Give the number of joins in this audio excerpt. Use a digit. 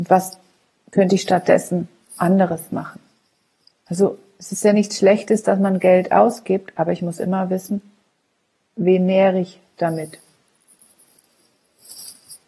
1